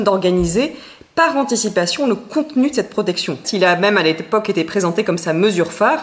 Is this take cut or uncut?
cut